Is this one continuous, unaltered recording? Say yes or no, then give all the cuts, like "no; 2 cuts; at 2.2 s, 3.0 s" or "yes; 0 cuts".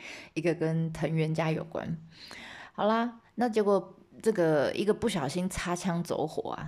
yes; 0 cuts